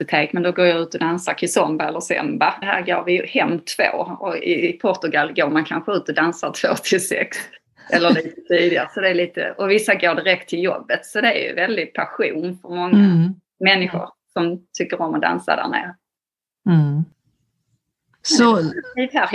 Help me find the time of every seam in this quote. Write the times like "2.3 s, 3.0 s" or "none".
2.6 s